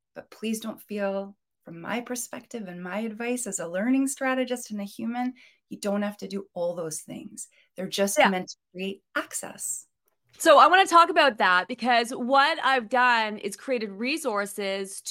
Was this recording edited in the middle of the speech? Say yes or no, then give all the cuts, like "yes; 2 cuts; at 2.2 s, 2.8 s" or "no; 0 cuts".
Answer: no; 0 cuts